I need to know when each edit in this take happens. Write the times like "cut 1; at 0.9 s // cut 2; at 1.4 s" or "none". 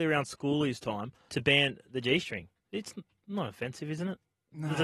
cut 1; at 1.3 s